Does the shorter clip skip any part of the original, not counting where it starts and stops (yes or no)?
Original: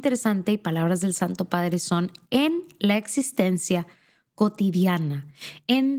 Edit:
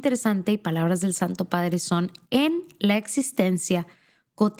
no